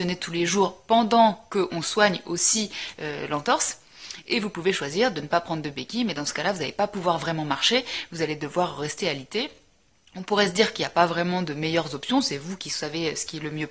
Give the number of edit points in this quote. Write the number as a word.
zero